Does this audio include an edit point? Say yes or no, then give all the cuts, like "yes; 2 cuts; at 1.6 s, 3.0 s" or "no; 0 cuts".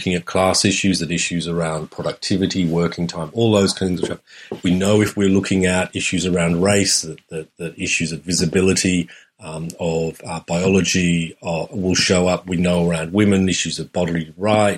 no; 0 cuts